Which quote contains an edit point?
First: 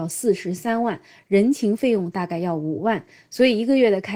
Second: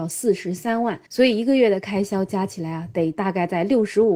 second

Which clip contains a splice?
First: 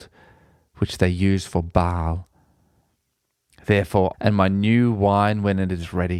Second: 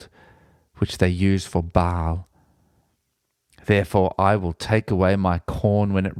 first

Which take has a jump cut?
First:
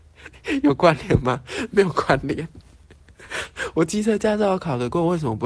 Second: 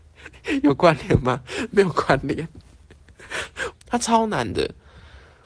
second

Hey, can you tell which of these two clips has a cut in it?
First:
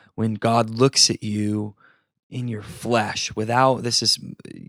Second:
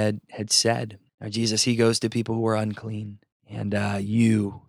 second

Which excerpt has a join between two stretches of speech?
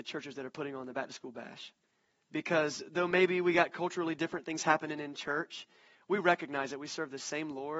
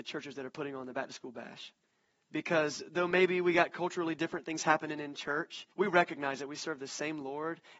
second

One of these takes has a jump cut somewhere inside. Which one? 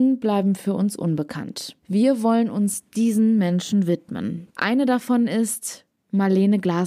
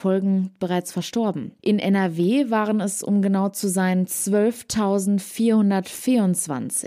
first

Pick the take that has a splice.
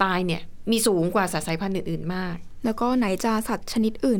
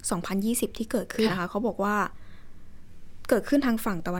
second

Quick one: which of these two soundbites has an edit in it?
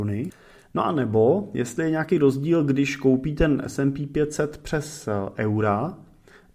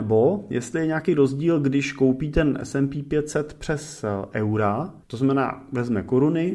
second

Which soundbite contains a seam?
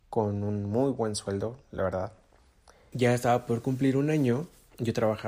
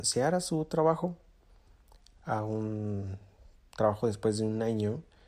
first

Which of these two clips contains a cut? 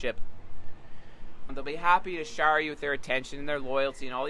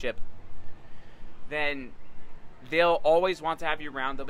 first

